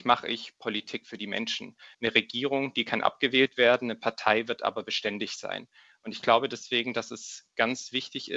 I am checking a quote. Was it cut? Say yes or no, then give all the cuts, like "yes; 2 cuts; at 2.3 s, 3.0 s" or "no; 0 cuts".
yes; 1 cut; at 1.9 s